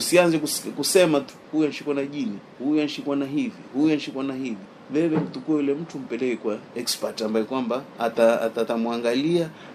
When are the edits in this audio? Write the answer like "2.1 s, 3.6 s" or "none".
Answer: none